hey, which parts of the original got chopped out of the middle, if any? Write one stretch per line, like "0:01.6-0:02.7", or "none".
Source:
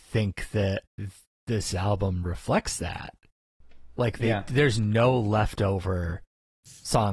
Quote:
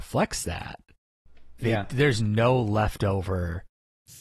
0:03.9-0:04.2